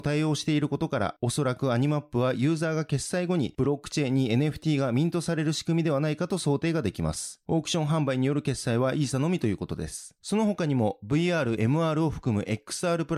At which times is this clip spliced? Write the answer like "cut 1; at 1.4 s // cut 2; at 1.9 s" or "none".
cut 1; at 7.4 s // cut 2; at 10.2 s // cut 3; at 11.6 s

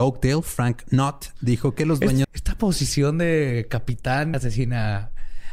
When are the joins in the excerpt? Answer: cut 1; at 2.2 s // cut 2; at 4.3 s

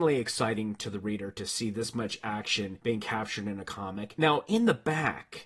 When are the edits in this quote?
cut 1; at 4.2 s

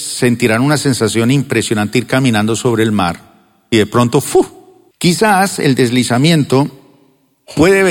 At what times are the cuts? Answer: cut 1; at 4.9 s

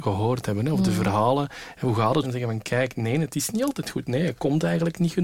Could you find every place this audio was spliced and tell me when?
cut 1; at 2.2 s

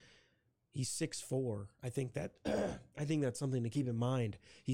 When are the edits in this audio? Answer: none

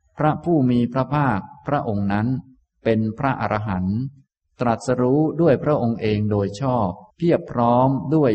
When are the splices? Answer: cut 1; at 7.1 s

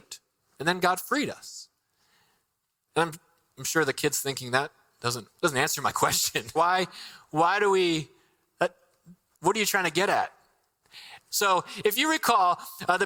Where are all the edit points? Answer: cut 1; at 5.3 s // cut 2; at 6.6 s // cut 3; at 11.3 s

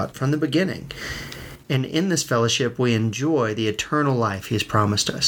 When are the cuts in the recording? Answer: cut 1; at 1.6 s

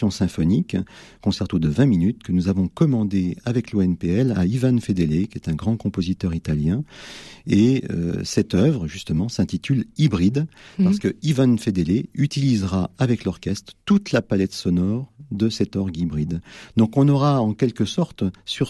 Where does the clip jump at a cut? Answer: none

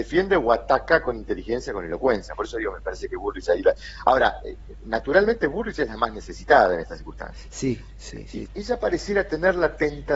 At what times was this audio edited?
cut 1; at 8.5 s

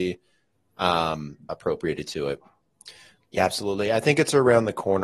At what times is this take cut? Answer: cut 1; at 1.5 s // cut 2; at 3.2 s

